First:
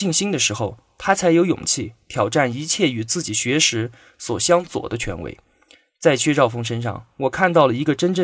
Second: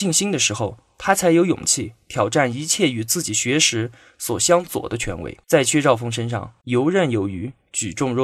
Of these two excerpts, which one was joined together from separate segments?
second; 2 cuts; at 5.4 s, 6.6 s

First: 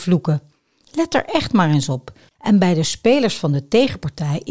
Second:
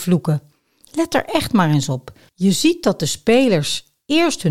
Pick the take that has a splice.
first; 1 cut; at 2.3 s

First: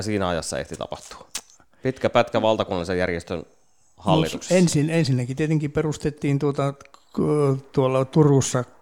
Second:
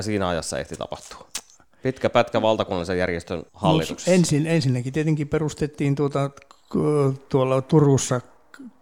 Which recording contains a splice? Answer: second; 1 cut; at 3.5 s

